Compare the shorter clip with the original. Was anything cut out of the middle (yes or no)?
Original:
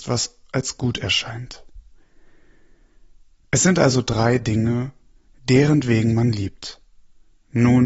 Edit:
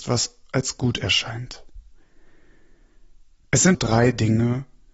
yes